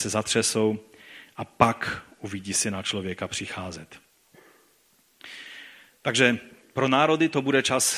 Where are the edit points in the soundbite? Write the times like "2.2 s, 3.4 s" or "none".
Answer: none